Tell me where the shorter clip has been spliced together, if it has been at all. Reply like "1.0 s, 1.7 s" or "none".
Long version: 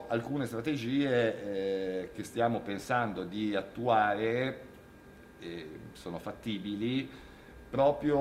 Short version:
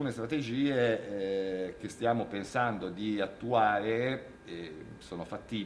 4.3 s